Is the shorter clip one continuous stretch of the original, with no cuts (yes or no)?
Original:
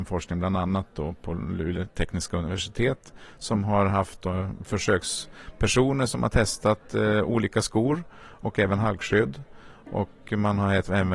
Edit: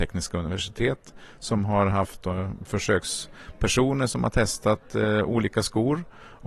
yes